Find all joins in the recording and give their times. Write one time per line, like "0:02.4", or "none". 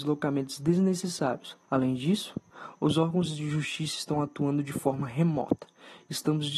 0:01.6